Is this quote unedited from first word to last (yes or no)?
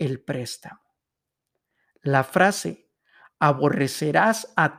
yes